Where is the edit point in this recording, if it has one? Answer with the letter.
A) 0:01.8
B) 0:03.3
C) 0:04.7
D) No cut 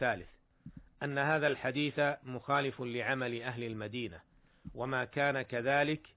D